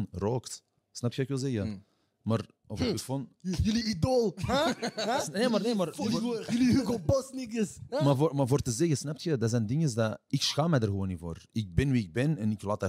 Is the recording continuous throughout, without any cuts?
yes; 0 cuts

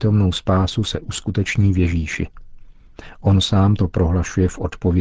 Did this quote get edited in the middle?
no; 0 cuts

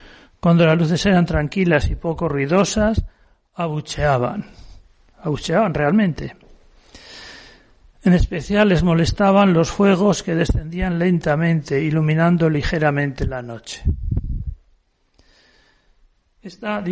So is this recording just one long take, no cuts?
yes; 0 cuts

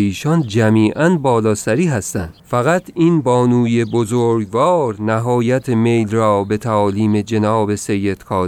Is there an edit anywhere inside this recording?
yes; 1 cut; at 2.4 s

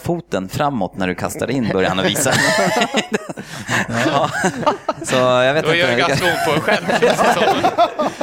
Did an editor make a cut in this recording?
no; 0 cuts

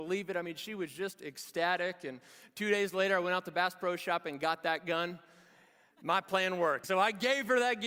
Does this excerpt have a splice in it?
yes; 1 cut; at 6.8 s

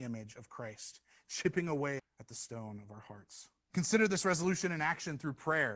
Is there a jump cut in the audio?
yes; 2 cuts; at 2.0 s, 3.7 s

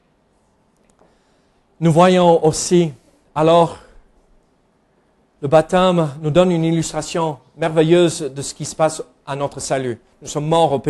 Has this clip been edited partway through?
no; 0 cuts

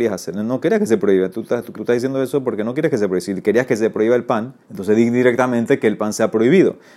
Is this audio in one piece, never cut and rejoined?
no; 2 cuts; at 1.7 s, 4.6 s

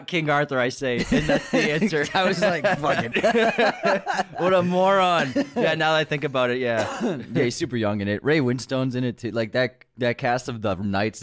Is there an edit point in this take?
yes; 1 cut; at 3.1 s

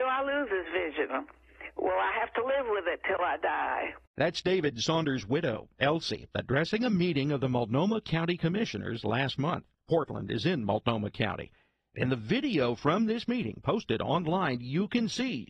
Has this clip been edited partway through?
yes; 1 cut; at 4.1 s

